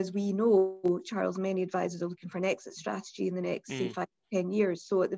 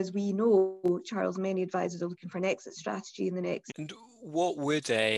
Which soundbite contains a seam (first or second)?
second